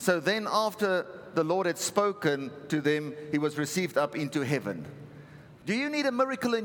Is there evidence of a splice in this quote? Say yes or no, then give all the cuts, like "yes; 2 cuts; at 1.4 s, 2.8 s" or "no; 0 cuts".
yes; 1 cut; at 5.6 s